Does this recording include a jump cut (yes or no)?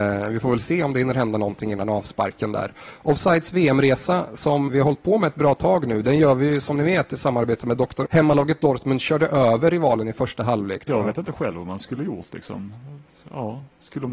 yes